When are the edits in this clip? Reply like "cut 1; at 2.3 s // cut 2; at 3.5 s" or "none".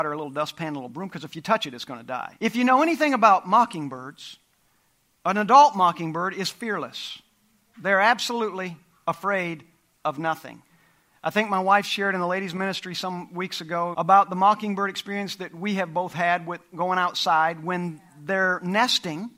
cut 1; at 2.4 s // cut 2; at 13.9 s